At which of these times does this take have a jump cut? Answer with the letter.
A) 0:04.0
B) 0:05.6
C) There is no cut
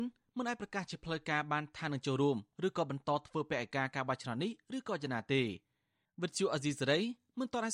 C